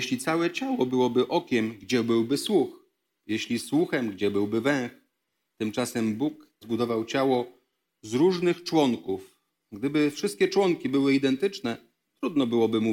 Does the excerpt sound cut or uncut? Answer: cut